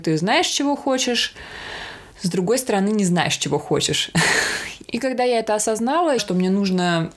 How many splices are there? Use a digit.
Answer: 3